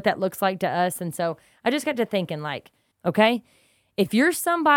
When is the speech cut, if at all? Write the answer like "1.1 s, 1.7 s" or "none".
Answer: 2.9 s